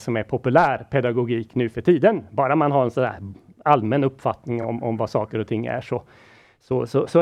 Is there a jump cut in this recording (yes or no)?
no